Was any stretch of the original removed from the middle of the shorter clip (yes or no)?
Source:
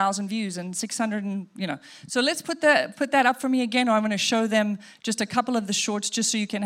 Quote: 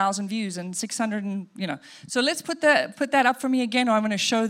no